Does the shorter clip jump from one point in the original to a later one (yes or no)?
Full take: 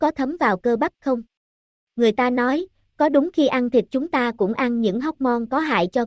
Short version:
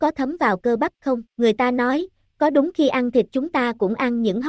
yes